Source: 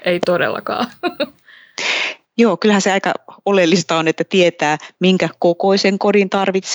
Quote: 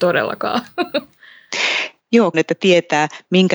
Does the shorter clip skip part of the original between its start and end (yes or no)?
yes